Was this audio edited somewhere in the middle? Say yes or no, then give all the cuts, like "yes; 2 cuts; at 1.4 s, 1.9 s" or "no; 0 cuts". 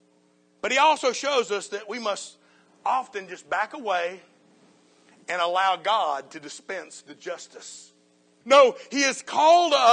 yes; 1 cut; at 8.4 s